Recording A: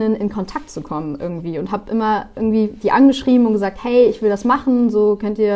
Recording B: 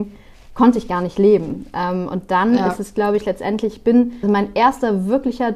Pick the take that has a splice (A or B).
B